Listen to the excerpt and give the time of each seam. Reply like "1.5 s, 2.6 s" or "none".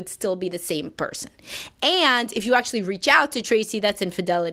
none